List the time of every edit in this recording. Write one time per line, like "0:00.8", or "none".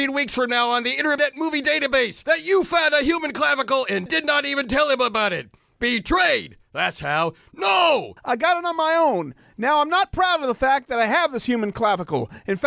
0:08.2